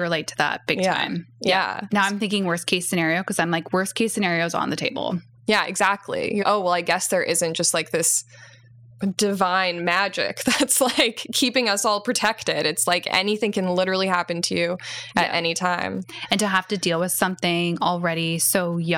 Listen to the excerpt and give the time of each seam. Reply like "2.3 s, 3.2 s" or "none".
6.4 s